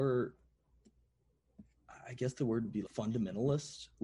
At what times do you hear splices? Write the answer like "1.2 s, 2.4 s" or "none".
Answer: 2.9 s